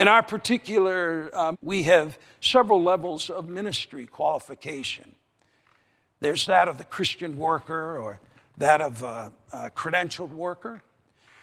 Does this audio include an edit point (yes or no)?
yes